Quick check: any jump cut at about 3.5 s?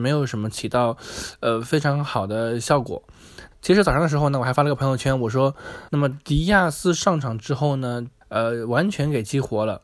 yes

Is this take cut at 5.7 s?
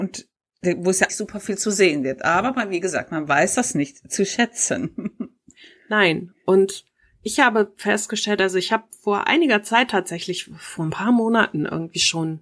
no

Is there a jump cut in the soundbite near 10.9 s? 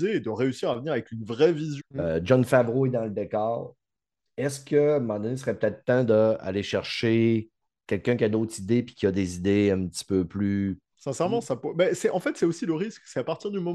yes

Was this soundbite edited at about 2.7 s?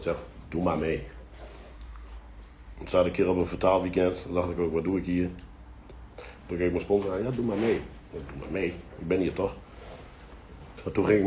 no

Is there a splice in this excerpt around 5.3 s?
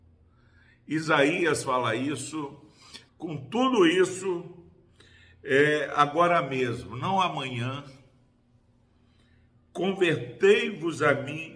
no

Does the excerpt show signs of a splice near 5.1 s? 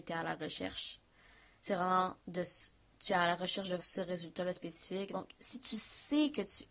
yes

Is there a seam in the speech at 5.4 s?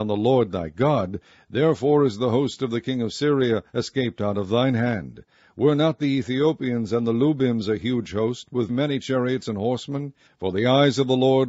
no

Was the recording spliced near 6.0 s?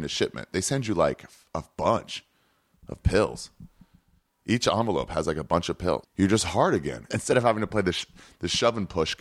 yes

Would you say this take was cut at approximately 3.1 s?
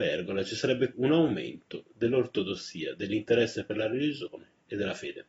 no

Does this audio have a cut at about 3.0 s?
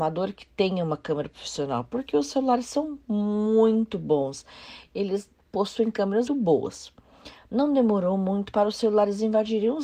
no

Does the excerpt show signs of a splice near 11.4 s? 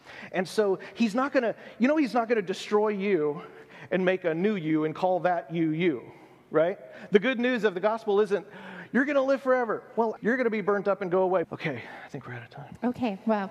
yes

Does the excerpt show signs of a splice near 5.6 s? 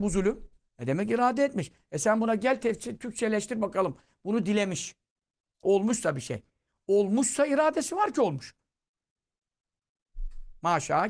yes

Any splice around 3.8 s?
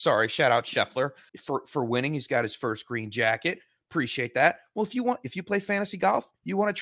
no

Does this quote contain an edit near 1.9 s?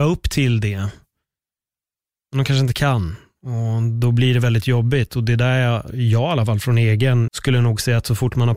no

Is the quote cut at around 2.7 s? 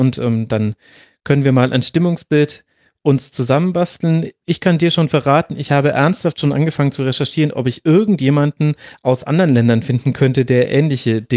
no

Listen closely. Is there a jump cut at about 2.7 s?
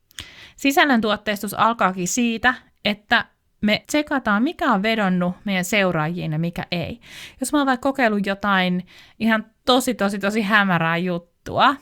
no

